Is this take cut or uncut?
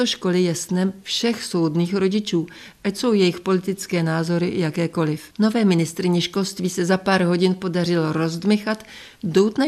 cut